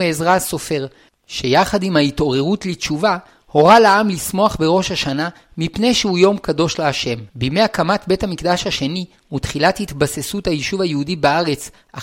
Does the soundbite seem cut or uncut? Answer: cut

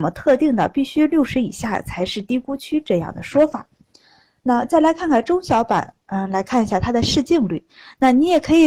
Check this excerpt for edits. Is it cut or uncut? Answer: uncut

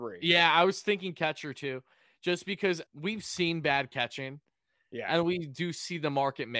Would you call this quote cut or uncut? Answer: cut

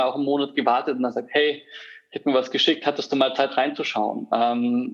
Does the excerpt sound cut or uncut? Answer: uncut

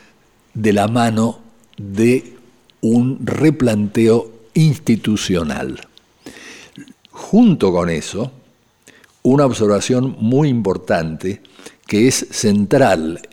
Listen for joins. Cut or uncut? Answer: cut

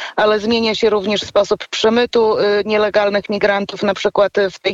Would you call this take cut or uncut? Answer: uncut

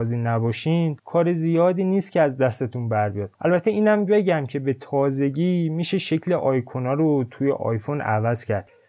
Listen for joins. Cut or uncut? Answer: cut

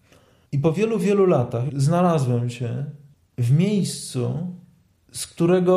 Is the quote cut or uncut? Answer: cut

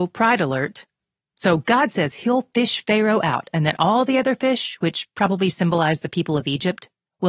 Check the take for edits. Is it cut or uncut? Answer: uncut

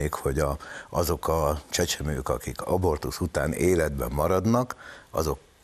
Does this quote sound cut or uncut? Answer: uncut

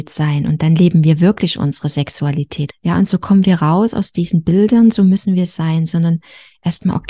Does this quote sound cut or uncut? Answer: cut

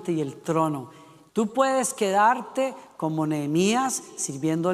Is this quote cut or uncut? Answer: cut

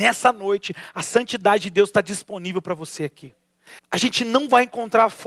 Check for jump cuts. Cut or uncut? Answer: cut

